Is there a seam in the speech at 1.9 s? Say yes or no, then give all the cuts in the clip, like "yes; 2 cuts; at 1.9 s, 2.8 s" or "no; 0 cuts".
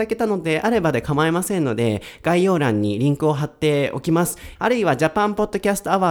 no; 1 cut; at 4.5 s